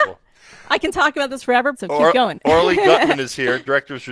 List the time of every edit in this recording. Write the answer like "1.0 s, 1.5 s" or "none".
1.7 s